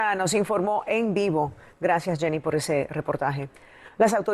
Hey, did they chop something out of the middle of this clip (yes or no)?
no